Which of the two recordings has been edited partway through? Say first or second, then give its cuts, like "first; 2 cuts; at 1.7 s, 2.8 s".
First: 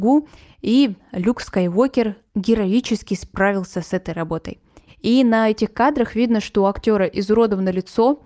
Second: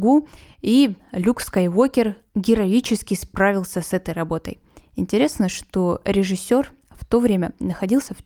first; 1 cut; at 4.9 s